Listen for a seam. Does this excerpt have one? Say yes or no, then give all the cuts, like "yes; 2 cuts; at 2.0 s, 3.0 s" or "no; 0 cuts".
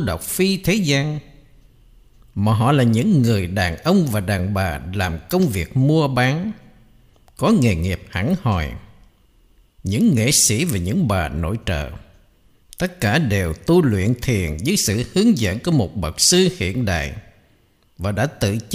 no; 0 cuts